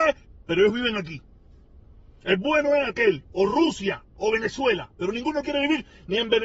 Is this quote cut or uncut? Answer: uncut